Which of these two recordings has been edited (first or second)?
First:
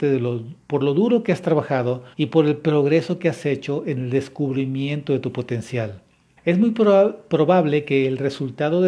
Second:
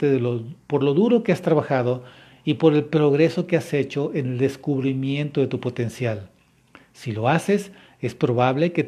first